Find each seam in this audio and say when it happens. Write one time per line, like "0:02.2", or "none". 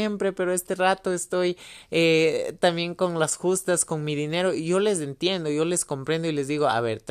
none